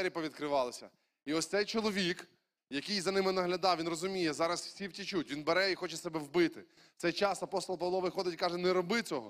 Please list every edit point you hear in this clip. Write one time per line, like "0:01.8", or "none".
none